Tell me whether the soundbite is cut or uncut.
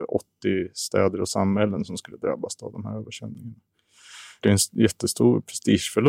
cut